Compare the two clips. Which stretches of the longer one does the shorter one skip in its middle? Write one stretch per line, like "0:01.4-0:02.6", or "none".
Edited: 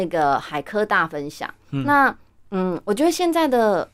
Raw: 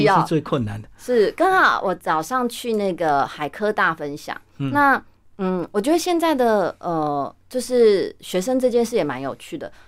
none

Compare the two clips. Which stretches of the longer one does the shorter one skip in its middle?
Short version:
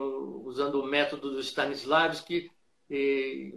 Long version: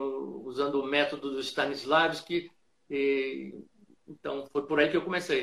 none

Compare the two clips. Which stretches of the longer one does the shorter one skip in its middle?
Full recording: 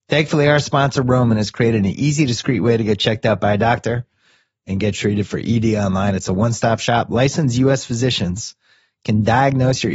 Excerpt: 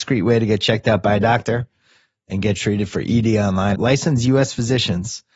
0:06.1-0:07.1

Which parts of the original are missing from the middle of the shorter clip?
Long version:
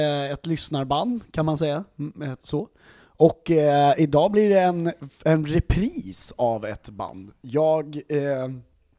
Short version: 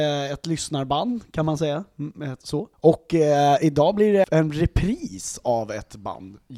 0:02.7-0:03.1
0:04.6-0:05.2

